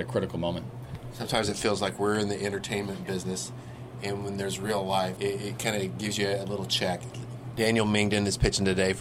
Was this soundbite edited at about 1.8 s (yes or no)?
no